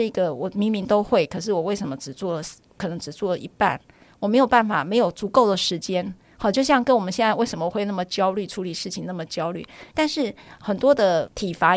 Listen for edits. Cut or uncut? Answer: cut